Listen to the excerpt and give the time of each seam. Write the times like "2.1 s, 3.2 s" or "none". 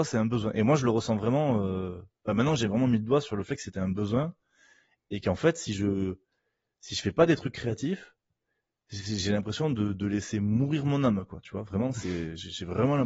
none